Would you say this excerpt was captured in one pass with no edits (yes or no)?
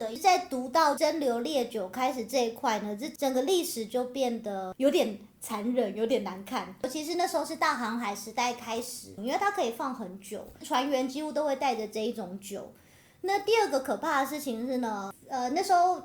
no